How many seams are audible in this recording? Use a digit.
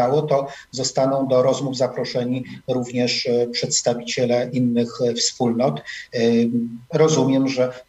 1